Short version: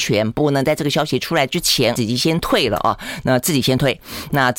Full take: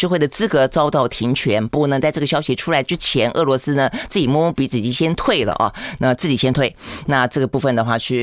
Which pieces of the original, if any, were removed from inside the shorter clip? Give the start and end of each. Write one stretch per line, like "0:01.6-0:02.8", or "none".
0:03.3-0:04.7